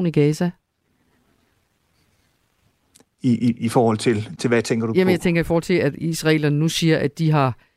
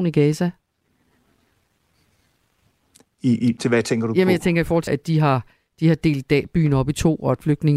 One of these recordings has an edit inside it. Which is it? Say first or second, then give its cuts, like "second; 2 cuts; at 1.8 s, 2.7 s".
second; 2 cuts; at 3.6 s, 4.9 s